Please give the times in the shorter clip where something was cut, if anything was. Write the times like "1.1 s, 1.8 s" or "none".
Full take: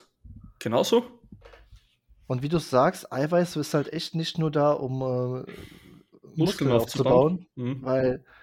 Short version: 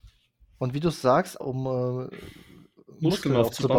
1.4 s

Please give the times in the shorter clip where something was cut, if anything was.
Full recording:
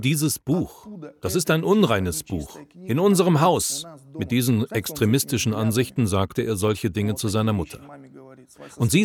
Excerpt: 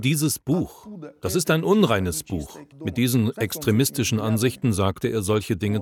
2.7 s

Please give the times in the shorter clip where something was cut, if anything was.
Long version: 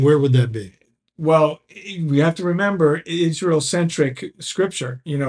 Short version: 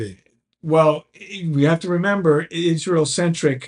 none

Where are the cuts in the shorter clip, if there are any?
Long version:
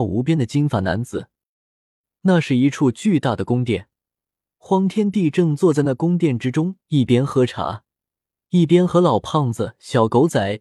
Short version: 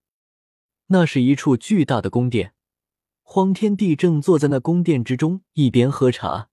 none

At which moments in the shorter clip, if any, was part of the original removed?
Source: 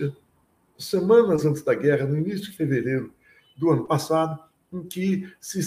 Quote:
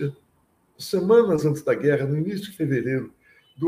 none

